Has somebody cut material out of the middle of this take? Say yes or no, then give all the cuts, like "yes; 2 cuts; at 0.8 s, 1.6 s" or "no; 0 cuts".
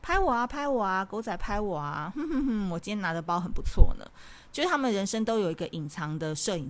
no; 0 cuts